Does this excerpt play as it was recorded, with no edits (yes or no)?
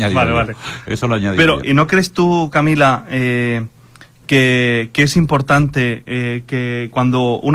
no